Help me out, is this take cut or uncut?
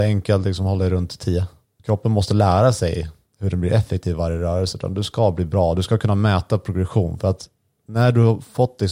cut